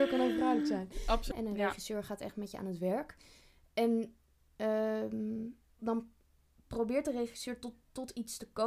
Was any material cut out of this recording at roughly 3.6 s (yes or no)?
no